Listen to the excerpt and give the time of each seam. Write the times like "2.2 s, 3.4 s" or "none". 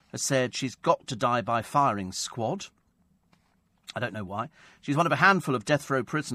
none

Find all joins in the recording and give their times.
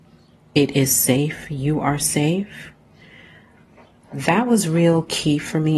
none

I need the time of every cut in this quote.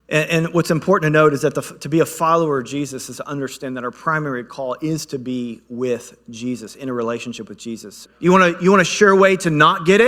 8.1 s

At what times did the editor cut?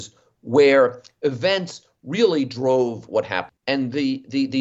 3.5 s

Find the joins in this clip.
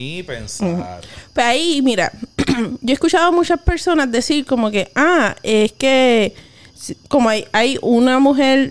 none

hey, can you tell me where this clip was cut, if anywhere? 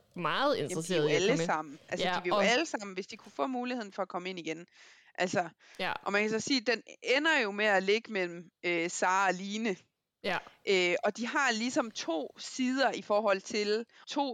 none

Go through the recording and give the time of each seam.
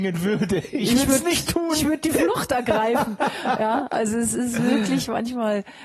none

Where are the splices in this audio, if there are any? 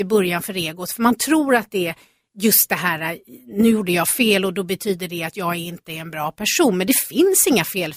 none

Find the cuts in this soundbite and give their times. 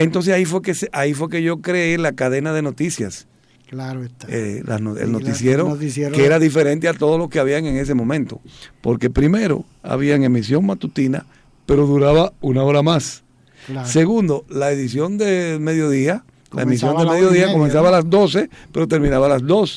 none

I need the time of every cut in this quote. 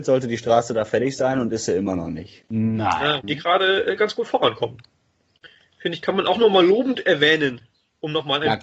3.2 s

